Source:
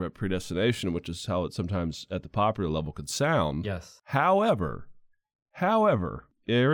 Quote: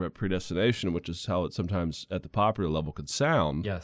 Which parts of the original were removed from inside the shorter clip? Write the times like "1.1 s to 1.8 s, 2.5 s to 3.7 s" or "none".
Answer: none